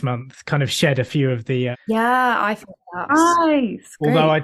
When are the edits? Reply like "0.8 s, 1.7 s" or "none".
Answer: 1.7 s, 3.1 s